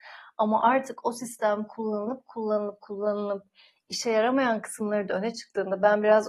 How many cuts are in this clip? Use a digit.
0